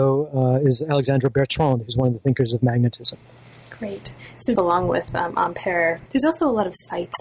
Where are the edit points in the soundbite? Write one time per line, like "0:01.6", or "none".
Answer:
0:04.6
0:06.1